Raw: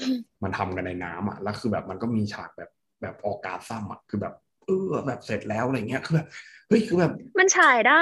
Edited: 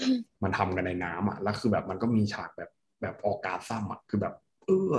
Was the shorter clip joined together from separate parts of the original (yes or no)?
no